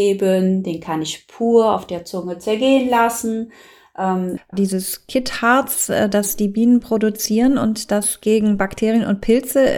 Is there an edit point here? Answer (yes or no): yes